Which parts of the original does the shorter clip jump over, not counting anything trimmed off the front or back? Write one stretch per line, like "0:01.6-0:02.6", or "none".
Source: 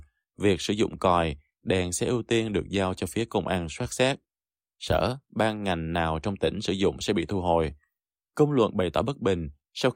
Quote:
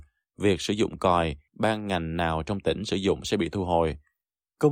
0:01.5-0:05.2